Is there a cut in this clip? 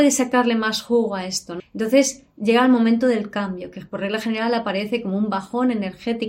yes; 1 cut; at 1.6 s

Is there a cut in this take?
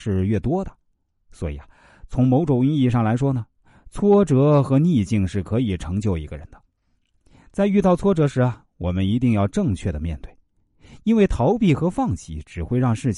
no; 0 cuts

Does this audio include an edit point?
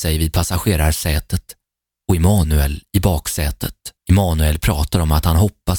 yes; 1 cut; at 4.0 s

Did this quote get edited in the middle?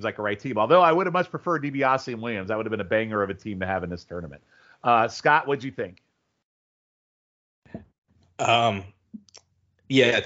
no; 0 cuts

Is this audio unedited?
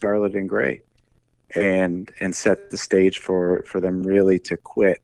yes; 0 cuts

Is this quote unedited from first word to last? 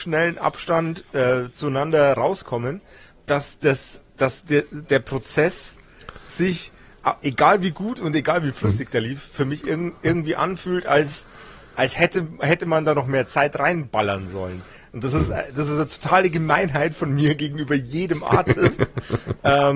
yes; 0 cuts

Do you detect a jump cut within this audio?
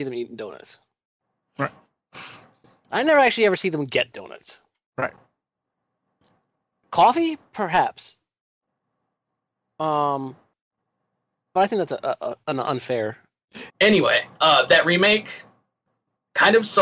yes; 1 cut; at 13.7 s

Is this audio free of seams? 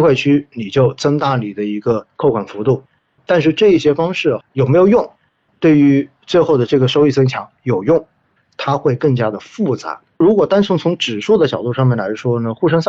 no; 2 cuts; at 8.4 s, 10.2 s

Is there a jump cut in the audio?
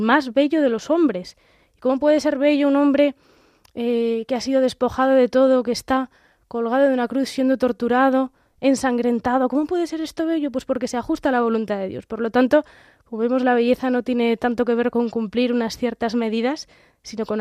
no; 0 cuts

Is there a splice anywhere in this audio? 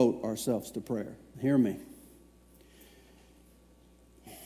yes; 1 cut; at 1.3 s

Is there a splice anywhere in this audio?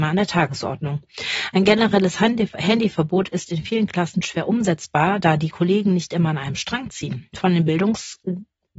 no; 0 cuts

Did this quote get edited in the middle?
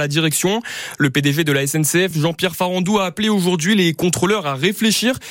no; 0 cuts

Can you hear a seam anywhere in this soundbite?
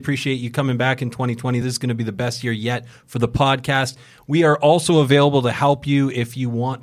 no; 0 cuts

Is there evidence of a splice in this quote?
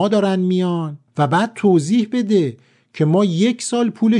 yes; 1 cut; at 1.1 s

